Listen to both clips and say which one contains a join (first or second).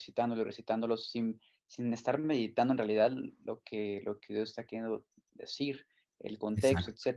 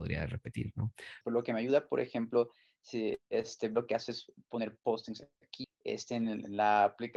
second